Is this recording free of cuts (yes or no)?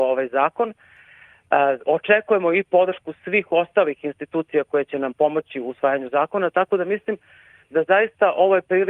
yes